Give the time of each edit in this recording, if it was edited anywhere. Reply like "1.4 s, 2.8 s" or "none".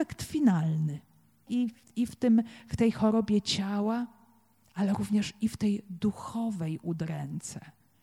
1.5 s